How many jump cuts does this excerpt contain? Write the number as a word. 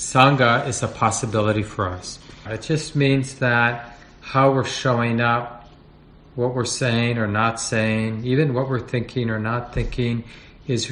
one